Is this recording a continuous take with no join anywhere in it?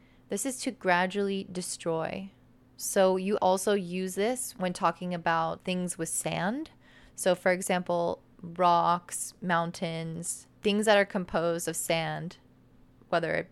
no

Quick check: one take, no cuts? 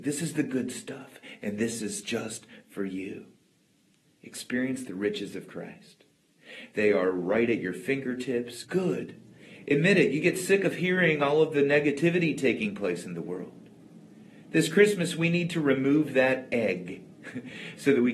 no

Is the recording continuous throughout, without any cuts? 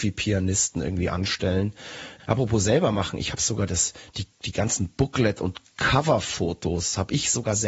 no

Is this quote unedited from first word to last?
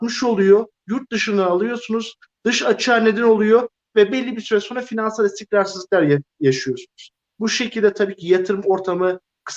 no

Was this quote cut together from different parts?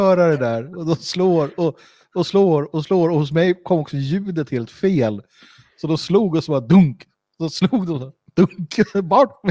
no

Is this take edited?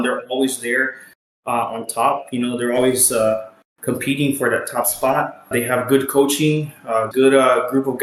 yes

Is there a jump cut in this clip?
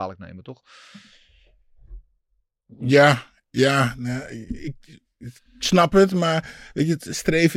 no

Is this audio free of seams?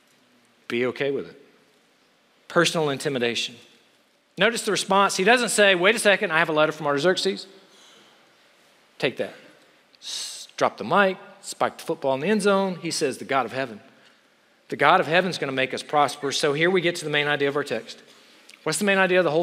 no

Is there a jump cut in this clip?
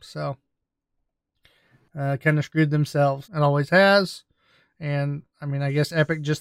yes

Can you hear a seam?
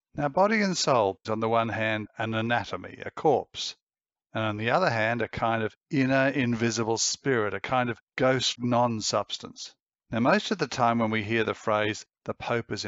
yes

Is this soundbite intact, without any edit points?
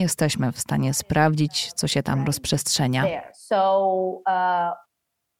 yes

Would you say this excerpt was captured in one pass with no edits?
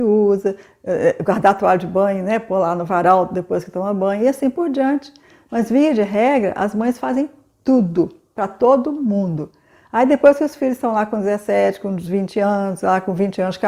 yes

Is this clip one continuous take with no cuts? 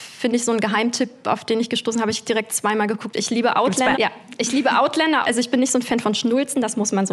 no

